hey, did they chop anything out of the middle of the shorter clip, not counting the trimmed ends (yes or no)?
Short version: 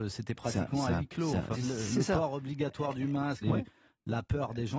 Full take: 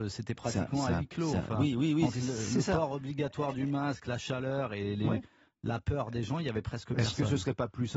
yes